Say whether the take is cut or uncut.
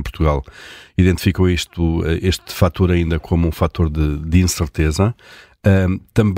uncut